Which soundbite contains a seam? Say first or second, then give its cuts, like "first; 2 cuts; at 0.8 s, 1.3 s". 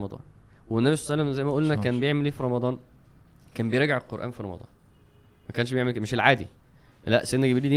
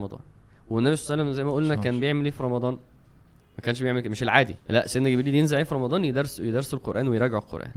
second; 2 cuts; at 3.4 s, 4.6 s